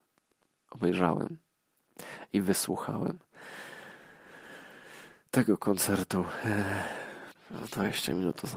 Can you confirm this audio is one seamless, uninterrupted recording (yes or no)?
no